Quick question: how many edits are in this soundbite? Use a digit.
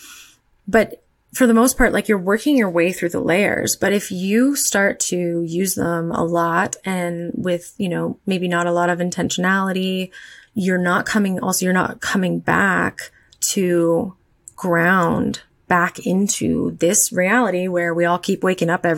1